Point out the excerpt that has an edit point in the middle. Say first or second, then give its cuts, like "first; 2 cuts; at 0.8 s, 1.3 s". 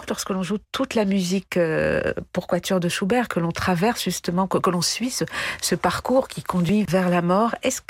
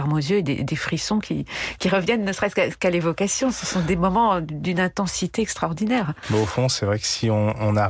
first; 1 cut; at 6.9 s